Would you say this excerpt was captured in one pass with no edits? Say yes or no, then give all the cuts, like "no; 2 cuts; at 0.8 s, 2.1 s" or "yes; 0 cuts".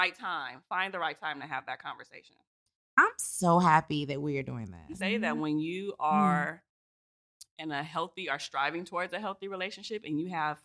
no; 1 cut; at 5.0 s